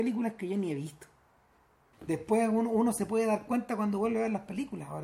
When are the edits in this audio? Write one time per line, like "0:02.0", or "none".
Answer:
0:01.9